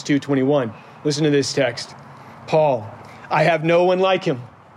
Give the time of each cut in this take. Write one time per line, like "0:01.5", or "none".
none